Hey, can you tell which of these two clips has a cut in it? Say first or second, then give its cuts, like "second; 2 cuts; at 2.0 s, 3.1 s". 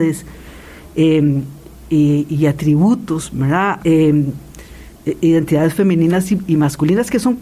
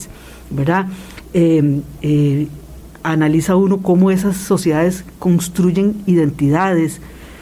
first; 1 cut; at 3.8 s